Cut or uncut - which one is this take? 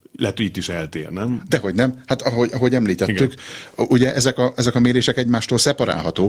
uncut